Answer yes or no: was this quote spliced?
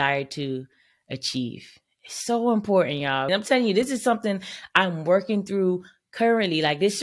yes